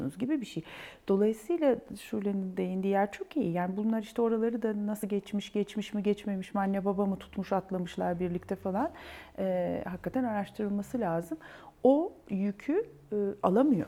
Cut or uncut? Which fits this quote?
uncut